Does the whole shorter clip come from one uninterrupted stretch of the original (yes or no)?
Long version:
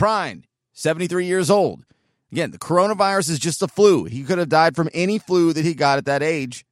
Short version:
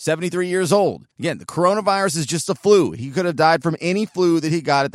no